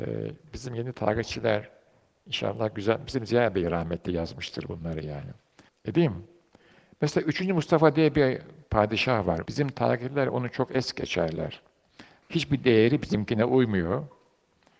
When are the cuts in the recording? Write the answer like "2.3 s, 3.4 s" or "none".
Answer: 5.7 s, 9.5 s, 12.2 s